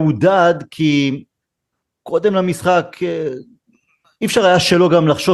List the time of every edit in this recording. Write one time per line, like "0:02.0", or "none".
none